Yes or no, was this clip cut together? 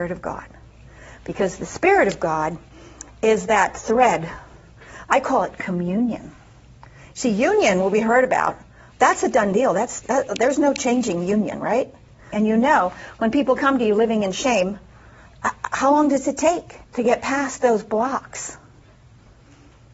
yes